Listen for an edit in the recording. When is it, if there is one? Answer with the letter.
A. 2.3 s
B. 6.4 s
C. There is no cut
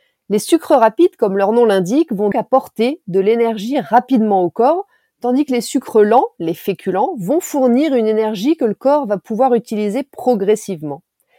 A